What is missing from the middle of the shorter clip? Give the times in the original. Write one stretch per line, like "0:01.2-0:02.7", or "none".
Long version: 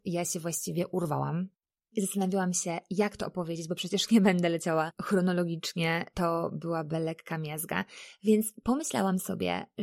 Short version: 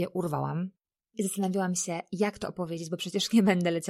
none